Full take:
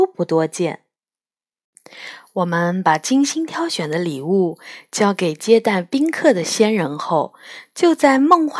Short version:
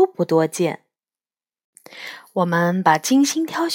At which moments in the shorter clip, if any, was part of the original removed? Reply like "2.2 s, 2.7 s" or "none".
none